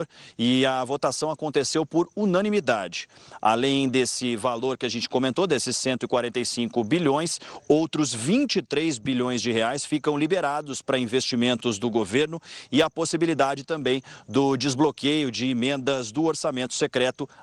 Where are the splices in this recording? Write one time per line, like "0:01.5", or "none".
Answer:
none